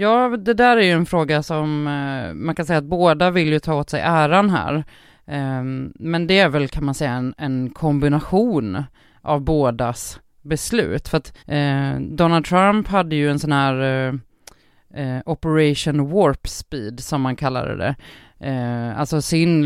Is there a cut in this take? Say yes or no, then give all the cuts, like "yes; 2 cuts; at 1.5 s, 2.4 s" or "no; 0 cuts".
yes; 1 cut; at 11.4 s